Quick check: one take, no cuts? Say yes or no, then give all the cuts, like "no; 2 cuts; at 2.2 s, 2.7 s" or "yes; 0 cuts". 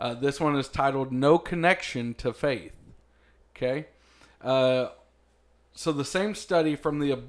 yes; 0 cuts